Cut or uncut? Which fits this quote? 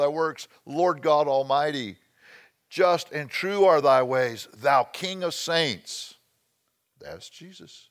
uncut